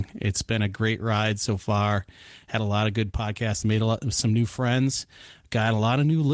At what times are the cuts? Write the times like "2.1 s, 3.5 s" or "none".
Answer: 3.6 s